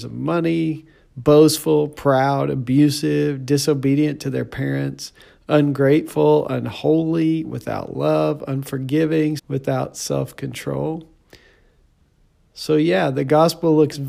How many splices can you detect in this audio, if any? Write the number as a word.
one